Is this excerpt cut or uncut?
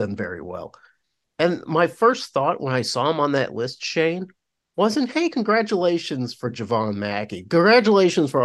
uncut